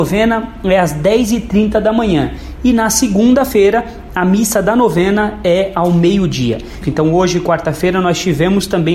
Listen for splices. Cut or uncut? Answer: cut